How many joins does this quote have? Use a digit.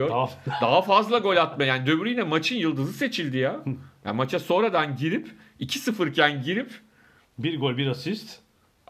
0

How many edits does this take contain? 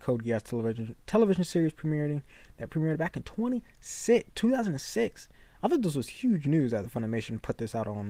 1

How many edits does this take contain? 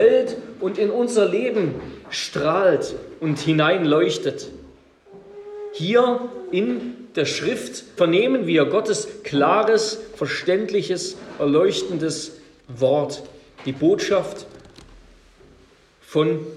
1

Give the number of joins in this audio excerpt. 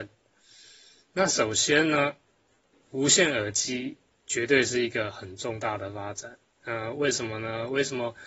1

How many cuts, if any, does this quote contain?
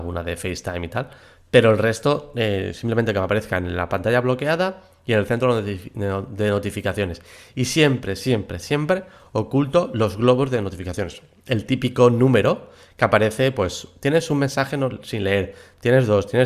0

